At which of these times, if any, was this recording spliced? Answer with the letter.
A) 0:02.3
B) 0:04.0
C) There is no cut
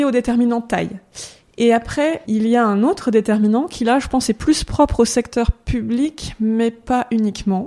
A